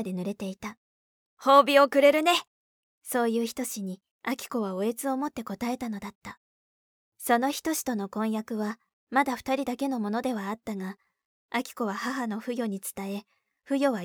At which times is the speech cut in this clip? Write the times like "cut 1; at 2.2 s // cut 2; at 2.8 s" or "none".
none